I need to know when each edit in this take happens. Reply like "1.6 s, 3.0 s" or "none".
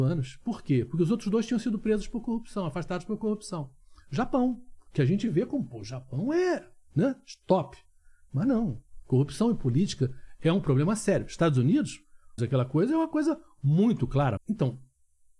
12.4 s, 14.4 s